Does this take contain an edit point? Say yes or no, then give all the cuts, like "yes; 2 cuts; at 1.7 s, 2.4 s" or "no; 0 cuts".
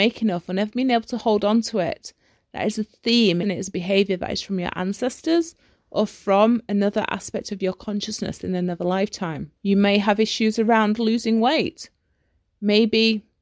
yes; 2 cuts; at 3.4 s, 9.6 s